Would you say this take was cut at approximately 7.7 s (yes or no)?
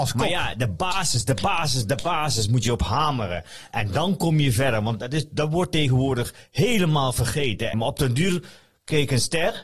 yes